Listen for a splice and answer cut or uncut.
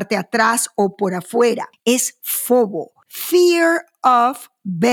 uncut